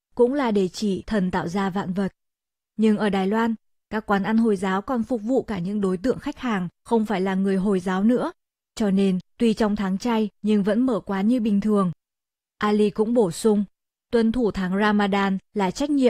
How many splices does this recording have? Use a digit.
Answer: 2